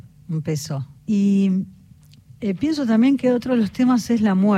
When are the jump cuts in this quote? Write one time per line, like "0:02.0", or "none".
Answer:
0:01.0